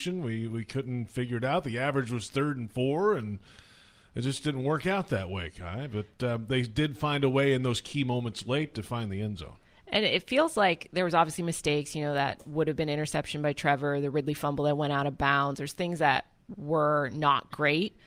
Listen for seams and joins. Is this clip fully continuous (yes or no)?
yes